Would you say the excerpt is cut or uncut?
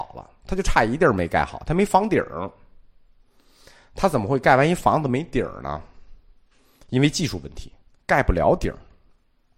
uncut